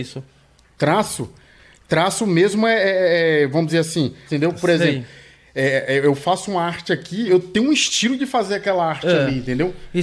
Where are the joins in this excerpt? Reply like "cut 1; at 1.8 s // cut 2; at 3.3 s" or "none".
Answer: cut 1; at 4.3 s // cut 2; at 7.3 s